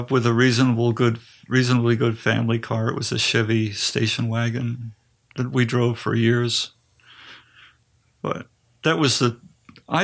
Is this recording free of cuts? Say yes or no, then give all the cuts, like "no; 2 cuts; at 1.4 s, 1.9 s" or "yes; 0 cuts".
yes; 0 cuts